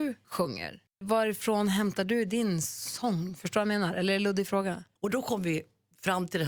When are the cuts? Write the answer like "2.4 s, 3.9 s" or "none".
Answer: 5.0 s

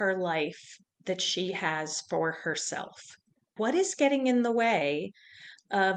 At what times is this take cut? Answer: 3.6 s

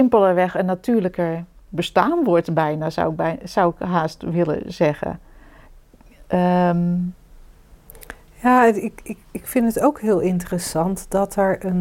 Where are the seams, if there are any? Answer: none

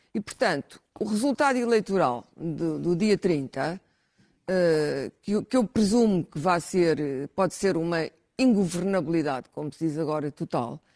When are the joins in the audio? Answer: none

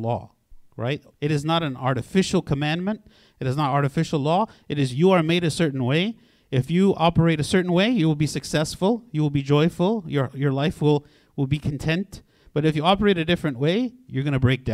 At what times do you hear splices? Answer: 1.1 s

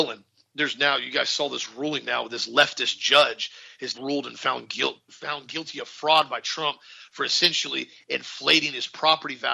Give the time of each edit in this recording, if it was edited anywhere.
3.9 s, 5.1 s

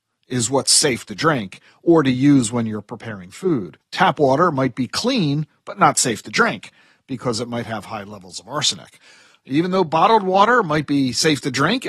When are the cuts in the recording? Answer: 3.8 s

